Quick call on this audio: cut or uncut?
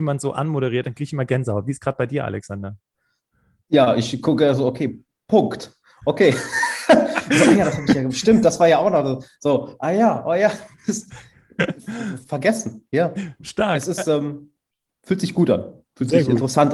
uncut